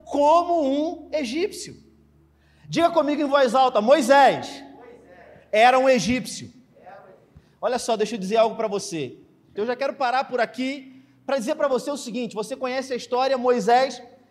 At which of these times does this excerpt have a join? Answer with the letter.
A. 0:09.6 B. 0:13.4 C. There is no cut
A